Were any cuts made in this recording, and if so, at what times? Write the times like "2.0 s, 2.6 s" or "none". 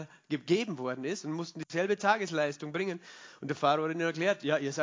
none